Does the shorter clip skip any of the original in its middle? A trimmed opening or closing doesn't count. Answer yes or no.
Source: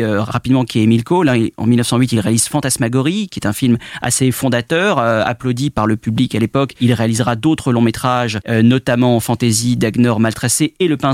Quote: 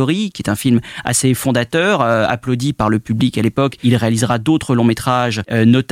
no